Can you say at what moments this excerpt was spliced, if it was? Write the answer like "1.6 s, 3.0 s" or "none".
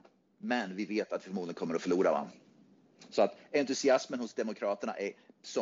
none